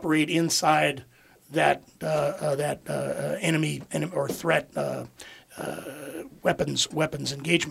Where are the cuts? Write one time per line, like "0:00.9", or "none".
none